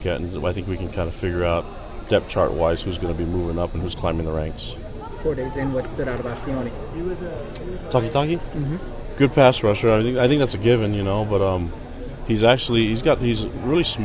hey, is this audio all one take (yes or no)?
yes